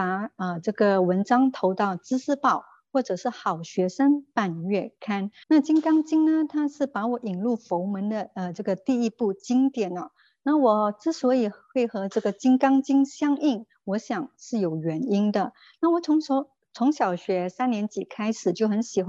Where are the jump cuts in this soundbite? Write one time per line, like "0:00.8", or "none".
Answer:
0:05.4
0:15.8